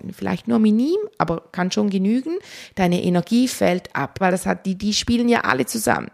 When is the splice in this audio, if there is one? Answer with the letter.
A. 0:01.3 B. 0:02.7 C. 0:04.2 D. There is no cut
C